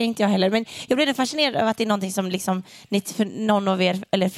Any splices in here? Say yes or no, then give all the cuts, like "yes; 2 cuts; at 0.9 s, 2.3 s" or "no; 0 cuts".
no; 0 cuts